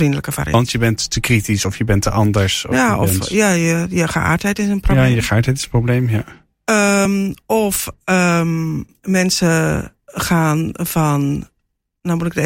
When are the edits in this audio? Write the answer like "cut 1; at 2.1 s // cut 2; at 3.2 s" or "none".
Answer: none